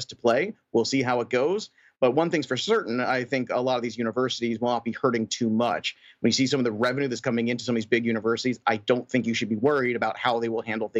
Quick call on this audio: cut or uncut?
uncut